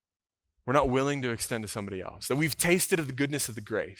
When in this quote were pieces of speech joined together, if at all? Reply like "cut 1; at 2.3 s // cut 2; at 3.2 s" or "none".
none

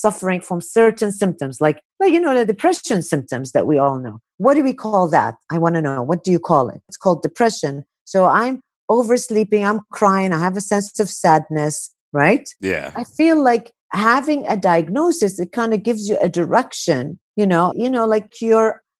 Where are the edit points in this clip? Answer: cut 1; at 6.9 s // cut 2; at 12.0 s // cut 3; at 17.7 s

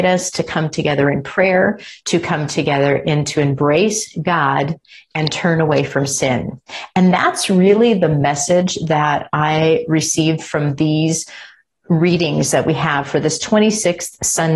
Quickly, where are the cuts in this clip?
cut 1; at 2.0 s

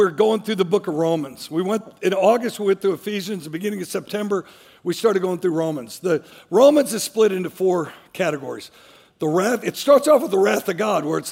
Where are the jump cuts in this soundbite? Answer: none

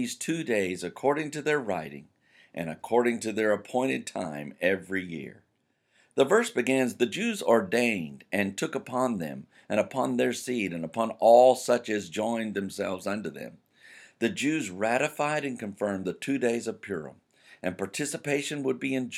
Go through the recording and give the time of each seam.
none

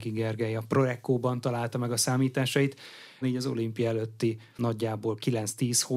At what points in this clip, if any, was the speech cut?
cut 1; at 3.2 s

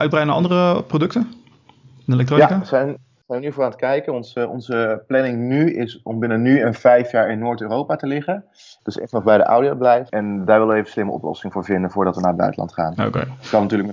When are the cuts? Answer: cut 1; at 8.8 s // cut 2; at 10.1 s

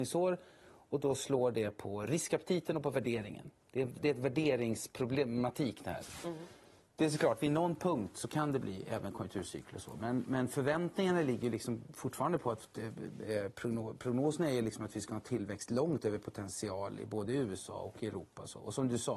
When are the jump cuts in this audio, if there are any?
none

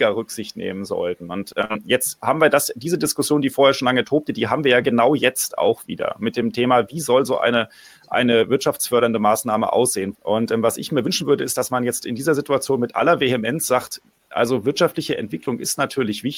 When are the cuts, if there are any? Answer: cut 1; at 10.1 s

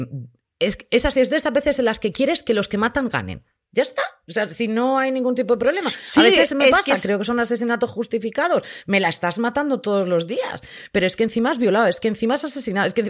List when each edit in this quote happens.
none

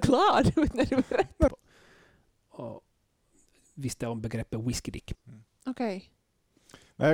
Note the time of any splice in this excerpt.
cut 1; at 1.5 s // cut 2; at 5.1 s

